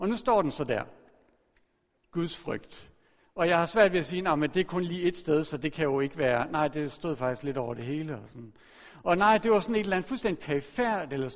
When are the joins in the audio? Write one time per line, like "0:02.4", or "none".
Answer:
none

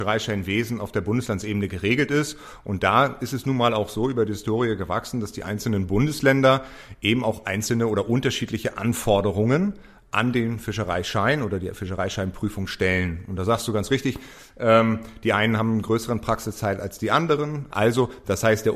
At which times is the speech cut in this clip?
0:17.7

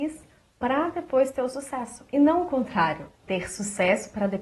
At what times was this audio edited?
0:03.1

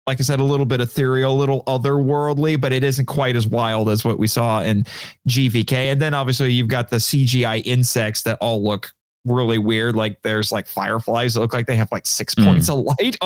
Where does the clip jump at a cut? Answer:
none

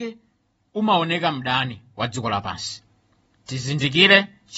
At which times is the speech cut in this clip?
none

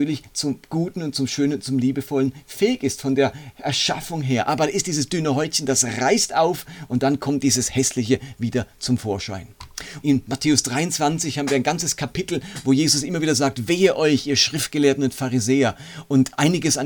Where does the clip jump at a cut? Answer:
0:10.0

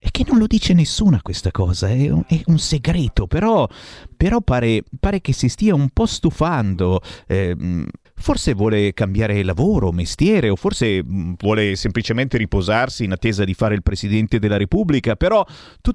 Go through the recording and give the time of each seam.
0:08.0

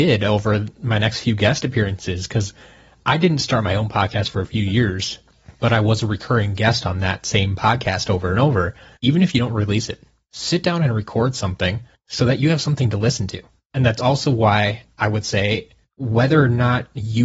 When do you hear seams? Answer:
0:09.0
0:15.8

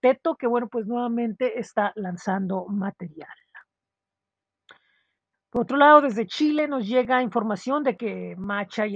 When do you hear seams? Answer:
0:05.3

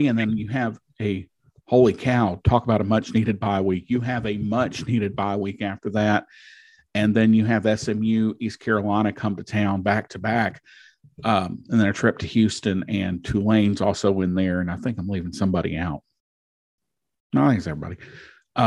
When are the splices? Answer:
none

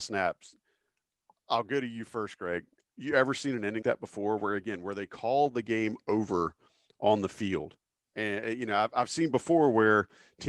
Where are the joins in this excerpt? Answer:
0:03.8

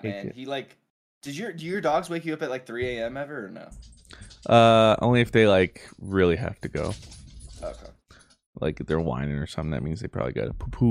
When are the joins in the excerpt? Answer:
none

